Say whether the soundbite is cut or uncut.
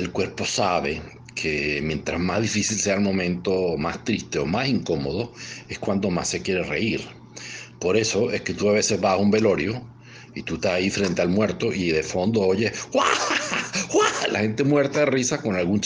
uncut